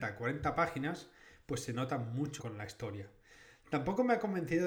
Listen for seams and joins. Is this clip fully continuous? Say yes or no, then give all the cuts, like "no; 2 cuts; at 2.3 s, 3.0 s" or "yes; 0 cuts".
no; 1 cut; at 2.4 s